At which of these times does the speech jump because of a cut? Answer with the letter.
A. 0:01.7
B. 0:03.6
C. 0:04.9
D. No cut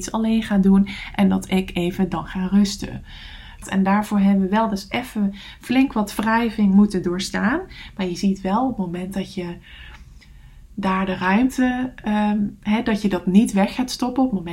B